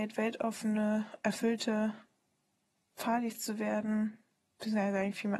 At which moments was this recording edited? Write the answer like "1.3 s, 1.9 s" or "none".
none